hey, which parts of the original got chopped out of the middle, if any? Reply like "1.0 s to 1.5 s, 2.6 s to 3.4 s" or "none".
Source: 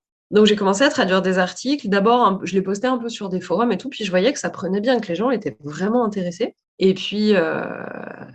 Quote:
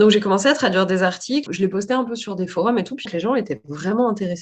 1.8 s to 2.4 s, 4.0 s to 5.0 s